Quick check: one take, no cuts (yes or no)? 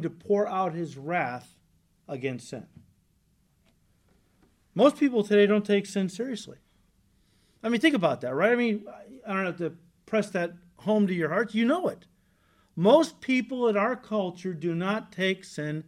yes